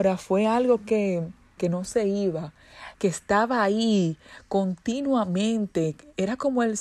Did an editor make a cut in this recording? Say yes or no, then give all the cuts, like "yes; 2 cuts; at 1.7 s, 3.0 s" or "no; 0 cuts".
yes; 2 cuts; at 1.6 s, 2.9 s